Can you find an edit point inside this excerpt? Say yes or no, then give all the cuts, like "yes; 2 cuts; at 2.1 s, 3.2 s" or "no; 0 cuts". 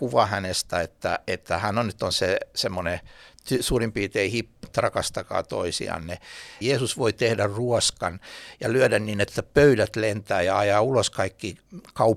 yes; 2 cuts; at 4.6 s, 6.6 s